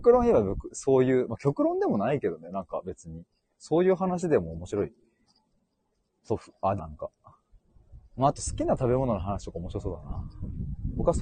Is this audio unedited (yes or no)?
no